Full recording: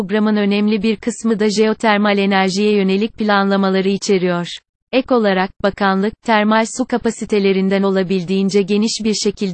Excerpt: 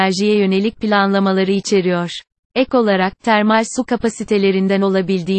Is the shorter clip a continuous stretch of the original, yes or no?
no